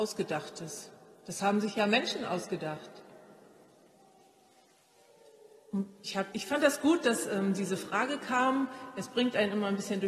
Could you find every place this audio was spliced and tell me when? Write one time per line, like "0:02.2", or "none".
0:06.3